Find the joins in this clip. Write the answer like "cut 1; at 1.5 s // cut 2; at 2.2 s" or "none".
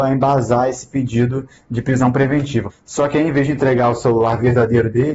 cut 1; at 2.7 s